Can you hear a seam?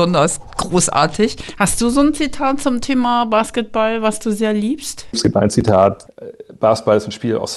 no; 0 cuts

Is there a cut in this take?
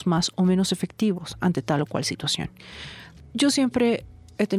yes; 1 cut; at 3.2 s

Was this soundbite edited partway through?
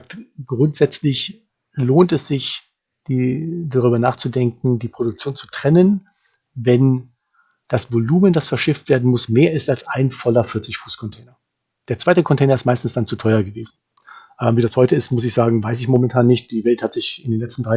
no; 0 cuts

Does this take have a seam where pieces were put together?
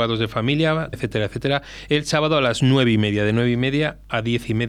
yes; 1 cut; at 0.9 s

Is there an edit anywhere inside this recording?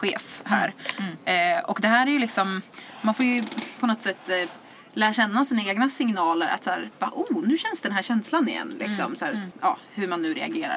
yes; 1 cut; at 9.5 s

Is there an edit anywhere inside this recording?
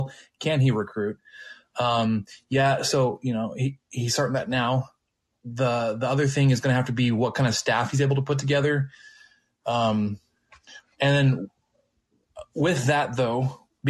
no; 0 cuts

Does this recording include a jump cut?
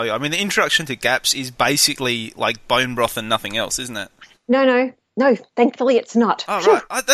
no; 0 cuts

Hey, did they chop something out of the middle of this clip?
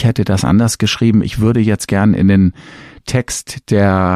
no; 0 cuts

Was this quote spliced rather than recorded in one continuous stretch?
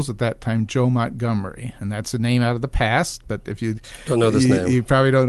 no; 0 cuts

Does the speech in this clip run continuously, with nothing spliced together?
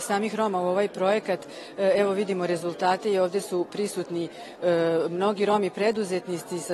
yes; 0 cuts

